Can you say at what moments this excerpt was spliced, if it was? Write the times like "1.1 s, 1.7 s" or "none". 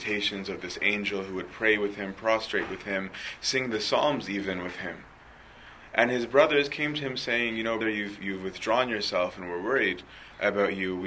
7.8 s